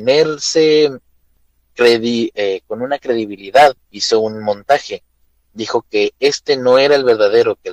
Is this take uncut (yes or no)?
no